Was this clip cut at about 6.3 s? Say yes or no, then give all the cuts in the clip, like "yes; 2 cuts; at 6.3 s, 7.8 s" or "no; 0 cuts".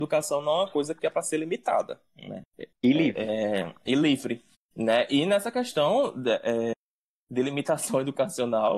no; 1 cut; at 2.7 s